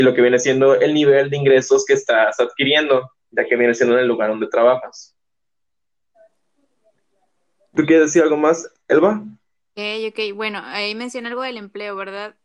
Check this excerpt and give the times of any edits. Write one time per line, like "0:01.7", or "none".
none